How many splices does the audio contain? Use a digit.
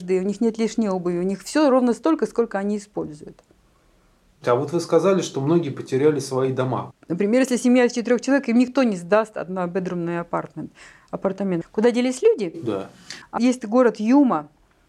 3